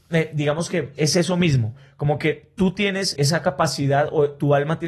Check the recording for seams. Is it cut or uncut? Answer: cut